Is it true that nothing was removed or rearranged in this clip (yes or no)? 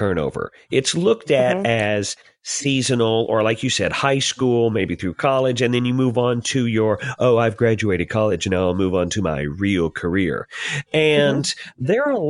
yes